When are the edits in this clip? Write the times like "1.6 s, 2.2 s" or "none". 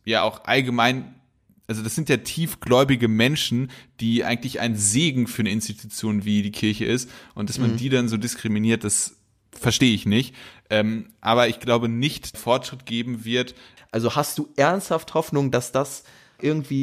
12.3 s, 13.8 s